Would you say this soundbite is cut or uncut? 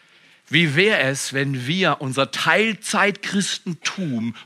uncut